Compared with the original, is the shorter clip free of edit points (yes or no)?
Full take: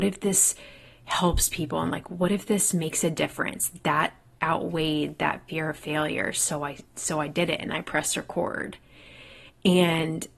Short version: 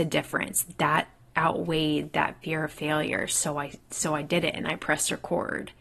yes